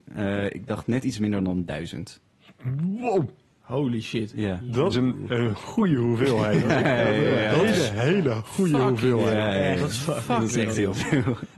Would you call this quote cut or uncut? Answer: cut